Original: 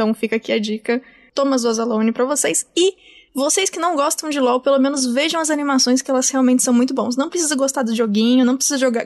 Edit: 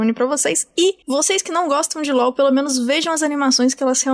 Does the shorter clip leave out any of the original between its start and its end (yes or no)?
yes